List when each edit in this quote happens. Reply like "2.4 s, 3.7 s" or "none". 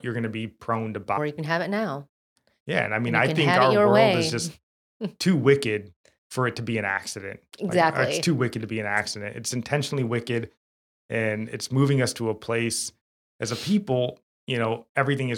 1.2 s